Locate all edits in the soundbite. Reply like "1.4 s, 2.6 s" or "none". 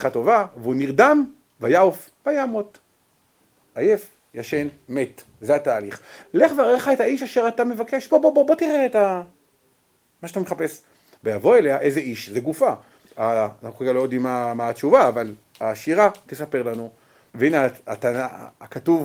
6.2 s, 13.1 s, 17.3 s